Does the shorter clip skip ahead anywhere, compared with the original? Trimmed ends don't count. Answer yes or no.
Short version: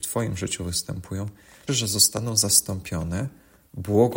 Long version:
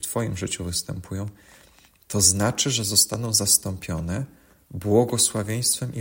yes